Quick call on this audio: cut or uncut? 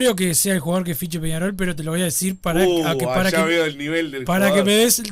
uncut